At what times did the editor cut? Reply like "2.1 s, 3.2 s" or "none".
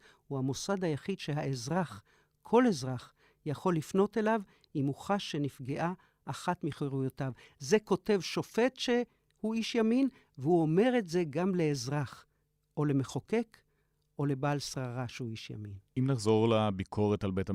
15.9 s